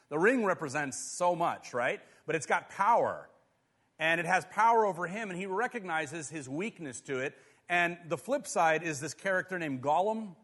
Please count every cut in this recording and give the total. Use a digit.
0